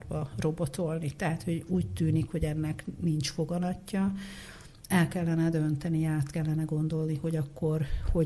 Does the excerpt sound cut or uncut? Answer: uncut